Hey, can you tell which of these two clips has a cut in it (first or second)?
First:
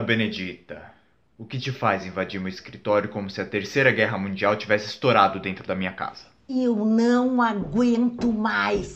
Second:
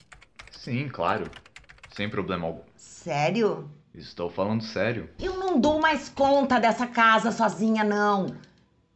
second